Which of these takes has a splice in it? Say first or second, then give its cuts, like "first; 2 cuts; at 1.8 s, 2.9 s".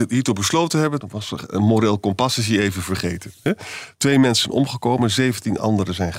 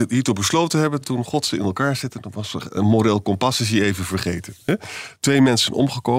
first; 1 cut; at 1.0 s